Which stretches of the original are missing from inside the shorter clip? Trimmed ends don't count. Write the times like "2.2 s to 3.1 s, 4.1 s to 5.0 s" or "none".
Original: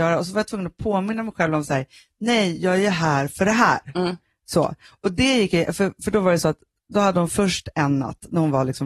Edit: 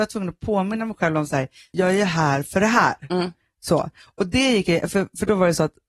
2.1 s to 2.6 s